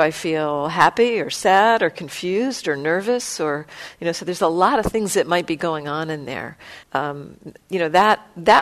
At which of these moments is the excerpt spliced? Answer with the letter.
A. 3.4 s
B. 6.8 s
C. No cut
B